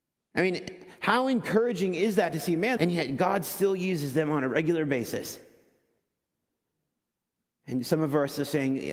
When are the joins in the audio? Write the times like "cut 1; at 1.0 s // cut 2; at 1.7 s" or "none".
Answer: cut 1; at 2.8 s